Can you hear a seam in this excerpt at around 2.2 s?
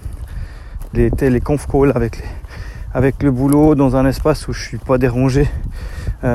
no; 1 cut; at 0.9 s

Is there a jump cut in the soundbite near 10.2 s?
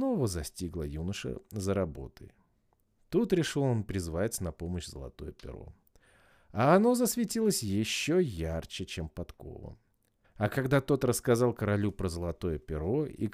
yes; 1 cut; at 10.2 s

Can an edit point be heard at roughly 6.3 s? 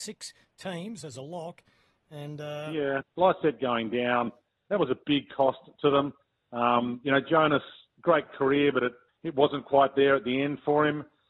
no; 2 cuts; at 3.0 s, 9.1 s

